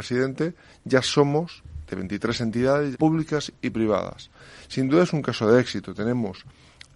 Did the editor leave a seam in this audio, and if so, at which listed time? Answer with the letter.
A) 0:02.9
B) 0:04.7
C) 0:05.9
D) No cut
A